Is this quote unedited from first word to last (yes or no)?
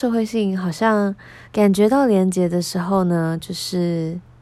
no